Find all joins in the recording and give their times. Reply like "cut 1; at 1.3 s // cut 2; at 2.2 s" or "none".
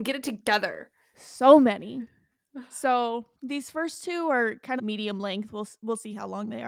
cut 1; at 3.3 s // cut 2; at 4.8 s